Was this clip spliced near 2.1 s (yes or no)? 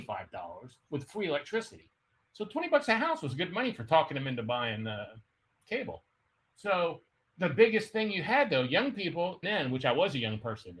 no